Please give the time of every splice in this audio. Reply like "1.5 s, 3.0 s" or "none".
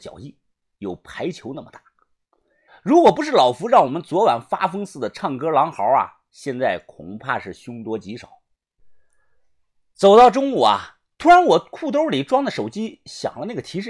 2.7 s